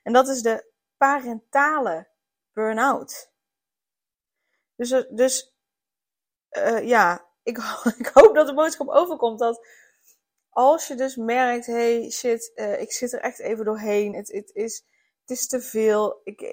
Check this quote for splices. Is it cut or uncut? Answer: uncut